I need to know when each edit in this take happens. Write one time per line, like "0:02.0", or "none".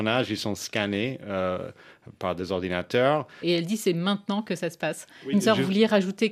0:03.4
0:05.3

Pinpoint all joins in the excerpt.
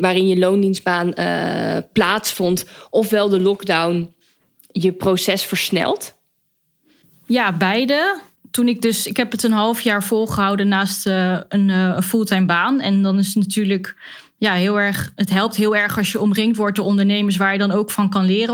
none

